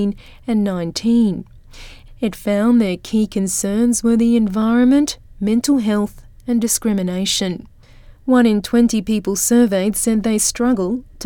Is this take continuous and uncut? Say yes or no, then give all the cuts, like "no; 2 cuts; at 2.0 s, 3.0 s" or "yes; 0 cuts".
no; 1 cut; at 8.2 s